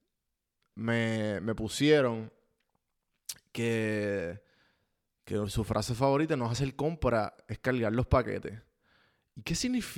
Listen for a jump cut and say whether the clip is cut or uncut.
uncut